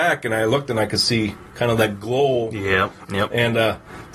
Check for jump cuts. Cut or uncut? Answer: cut